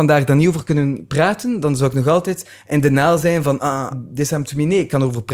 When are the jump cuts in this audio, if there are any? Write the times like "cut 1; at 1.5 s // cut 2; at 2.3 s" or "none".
cut 1; at 3.9 s